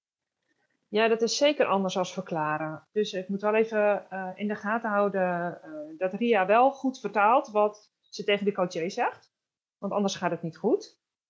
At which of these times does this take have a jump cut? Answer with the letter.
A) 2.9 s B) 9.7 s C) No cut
A